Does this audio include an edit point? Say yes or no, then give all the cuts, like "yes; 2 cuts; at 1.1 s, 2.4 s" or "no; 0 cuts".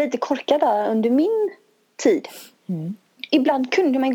no; 0 cuts